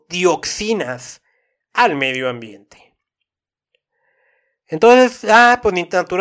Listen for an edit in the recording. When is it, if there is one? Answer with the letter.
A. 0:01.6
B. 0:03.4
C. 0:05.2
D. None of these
D